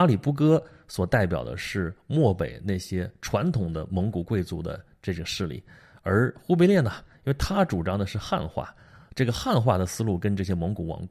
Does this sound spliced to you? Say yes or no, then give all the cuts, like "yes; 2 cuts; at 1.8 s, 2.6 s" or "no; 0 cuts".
no; 0 cuts